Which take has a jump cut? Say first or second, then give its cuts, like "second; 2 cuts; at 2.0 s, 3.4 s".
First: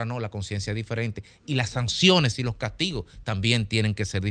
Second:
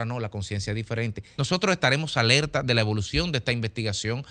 second; 1 cut; at 1.4 s